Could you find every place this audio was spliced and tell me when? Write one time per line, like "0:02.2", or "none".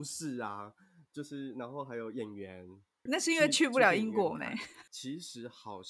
0:03.1
0:04.9